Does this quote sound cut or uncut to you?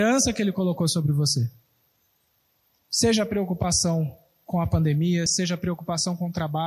uncut